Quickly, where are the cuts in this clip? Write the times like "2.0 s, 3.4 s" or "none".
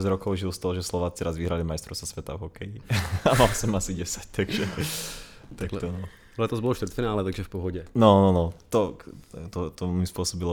none